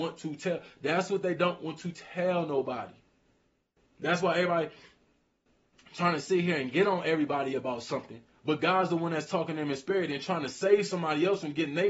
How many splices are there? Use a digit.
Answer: 1